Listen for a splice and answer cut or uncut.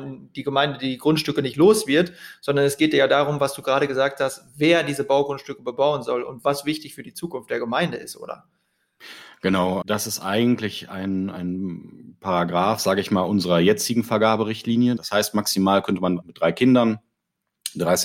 cut